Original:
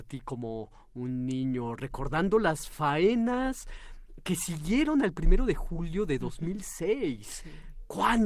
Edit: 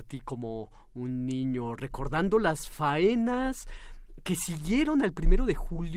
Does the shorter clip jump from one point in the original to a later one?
no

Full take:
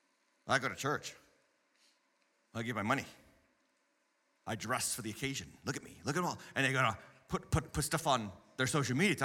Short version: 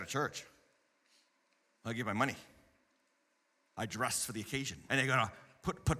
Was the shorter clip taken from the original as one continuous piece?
no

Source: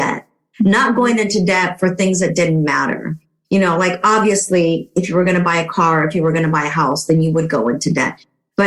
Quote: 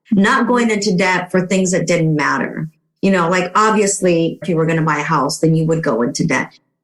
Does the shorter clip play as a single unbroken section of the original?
no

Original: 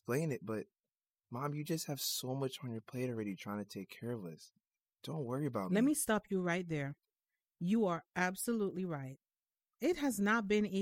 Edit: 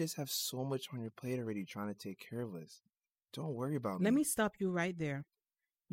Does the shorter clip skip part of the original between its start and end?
no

